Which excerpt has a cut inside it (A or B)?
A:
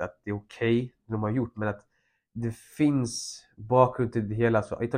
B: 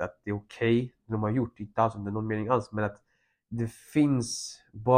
A